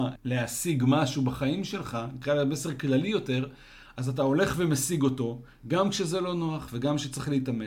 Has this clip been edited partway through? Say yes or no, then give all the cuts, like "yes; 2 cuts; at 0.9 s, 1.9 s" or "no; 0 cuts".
no; 0 cuts